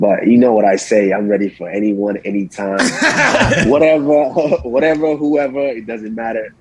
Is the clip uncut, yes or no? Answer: yes